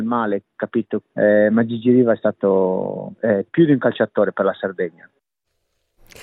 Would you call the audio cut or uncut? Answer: cut